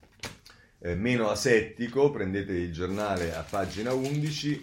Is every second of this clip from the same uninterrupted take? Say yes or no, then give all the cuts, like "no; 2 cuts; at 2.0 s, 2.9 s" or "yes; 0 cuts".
yes; 0 cuts